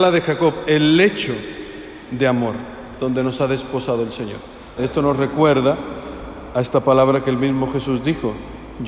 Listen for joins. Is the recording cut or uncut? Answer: cut